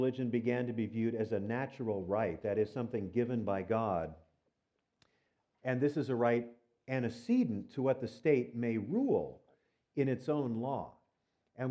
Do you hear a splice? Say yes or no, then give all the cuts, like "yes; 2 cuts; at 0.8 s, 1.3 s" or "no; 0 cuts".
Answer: no; 0 cuts